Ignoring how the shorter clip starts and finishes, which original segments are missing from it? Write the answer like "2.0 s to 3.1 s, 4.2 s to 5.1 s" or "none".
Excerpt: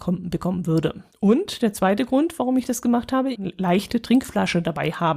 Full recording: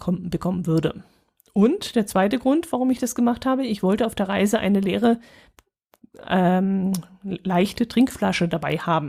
1.1 s to 1.4 s, 3.7 s to 7.2 s